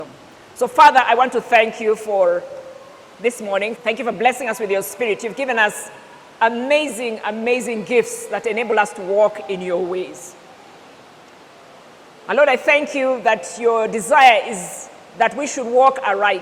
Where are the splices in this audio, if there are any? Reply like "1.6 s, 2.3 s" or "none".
3.8 s